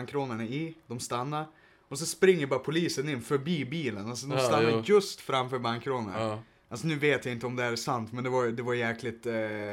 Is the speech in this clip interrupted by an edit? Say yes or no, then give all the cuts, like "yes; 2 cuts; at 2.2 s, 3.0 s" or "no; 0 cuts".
no; 0 cuts